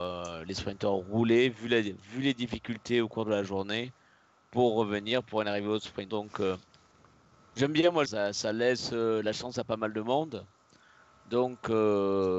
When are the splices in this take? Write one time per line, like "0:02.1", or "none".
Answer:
0:06.1
0:08.1